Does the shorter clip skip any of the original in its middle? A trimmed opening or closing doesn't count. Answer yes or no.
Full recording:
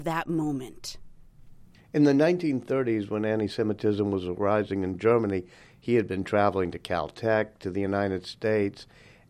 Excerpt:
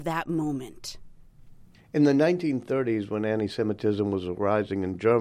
no